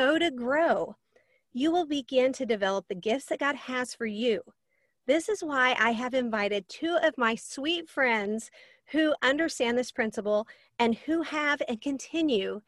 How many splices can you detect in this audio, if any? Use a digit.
0